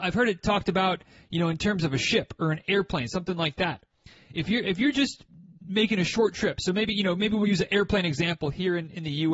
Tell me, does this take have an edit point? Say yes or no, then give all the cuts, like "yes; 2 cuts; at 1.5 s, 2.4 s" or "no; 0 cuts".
no; 0 cuts